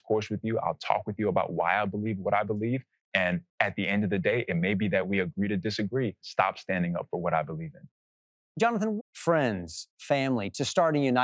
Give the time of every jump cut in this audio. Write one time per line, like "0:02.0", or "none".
0:06.2
0:09.0